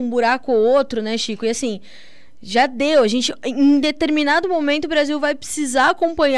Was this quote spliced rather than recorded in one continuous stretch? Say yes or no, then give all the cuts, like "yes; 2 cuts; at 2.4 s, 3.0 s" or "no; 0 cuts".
no; 0 cuts